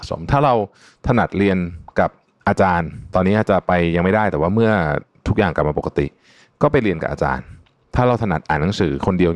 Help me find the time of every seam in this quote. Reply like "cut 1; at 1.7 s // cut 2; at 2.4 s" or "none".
none